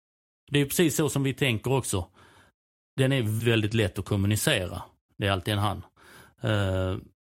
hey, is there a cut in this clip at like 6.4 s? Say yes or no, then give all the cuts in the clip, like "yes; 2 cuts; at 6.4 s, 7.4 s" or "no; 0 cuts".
no; 2 cuts; at 3.4 s, 5.1 s